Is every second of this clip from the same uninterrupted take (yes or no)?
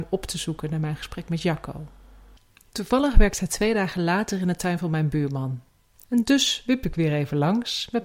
yes